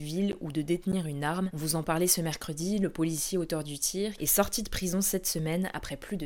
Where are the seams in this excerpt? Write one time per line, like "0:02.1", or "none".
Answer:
0:01.5
0:04.2